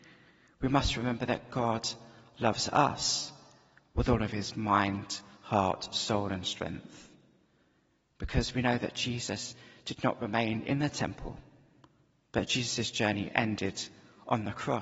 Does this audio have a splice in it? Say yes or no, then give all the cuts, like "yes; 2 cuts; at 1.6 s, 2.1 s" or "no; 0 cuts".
no; 0 cuts